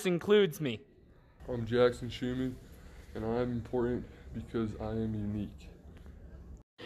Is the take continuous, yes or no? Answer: no